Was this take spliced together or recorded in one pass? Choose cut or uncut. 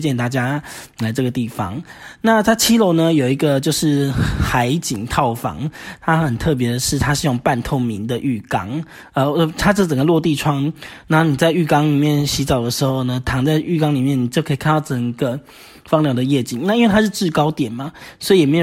uncut